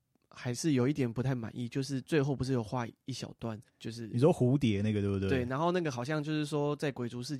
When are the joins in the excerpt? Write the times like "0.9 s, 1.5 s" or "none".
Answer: 3.7 s